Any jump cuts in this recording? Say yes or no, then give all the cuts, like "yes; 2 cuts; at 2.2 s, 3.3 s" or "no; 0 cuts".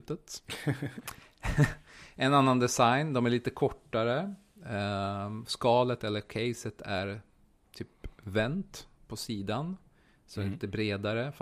no; 0 cuts